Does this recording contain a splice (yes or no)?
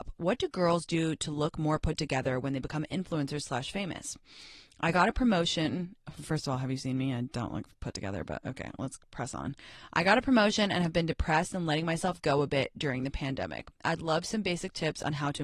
no